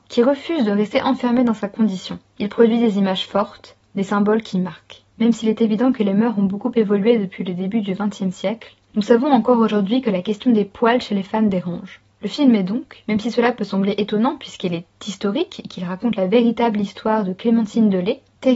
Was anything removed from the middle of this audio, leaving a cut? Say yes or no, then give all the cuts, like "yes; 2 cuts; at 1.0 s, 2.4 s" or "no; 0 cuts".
yes; 1 cut; at 2.4 s